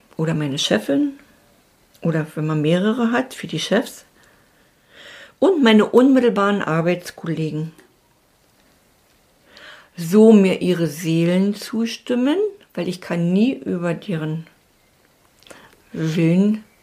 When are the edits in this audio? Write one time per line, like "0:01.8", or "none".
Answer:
none